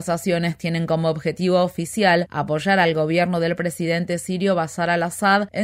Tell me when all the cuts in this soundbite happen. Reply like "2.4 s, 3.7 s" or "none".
none